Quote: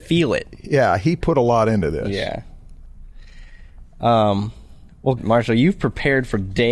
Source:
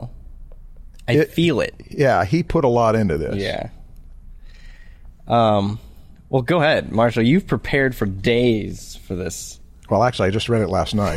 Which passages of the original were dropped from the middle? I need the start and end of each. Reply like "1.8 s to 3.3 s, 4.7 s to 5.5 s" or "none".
6.4 s to 6.8 s